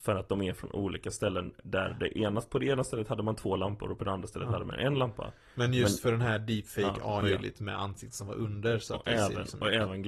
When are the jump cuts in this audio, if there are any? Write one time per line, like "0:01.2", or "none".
0:07.2